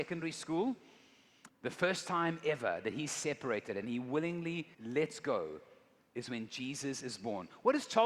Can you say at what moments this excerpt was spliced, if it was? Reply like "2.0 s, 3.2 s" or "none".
1.5 s, 4.7 s